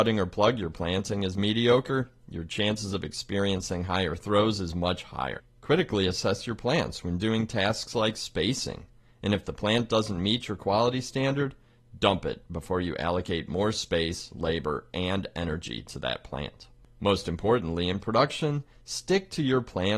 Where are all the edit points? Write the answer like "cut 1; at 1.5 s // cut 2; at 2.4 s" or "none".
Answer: none